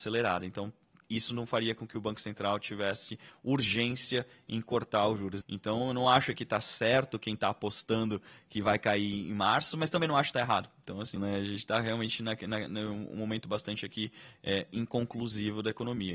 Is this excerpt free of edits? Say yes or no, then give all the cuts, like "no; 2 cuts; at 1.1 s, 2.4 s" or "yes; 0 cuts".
no; 2 cuts; at 5.4 s, 11.2 s